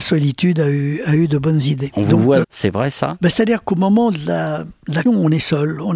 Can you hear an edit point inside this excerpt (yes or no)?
yes